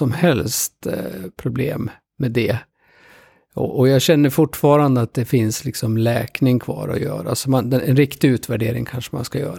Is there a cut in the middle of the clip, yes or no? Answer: no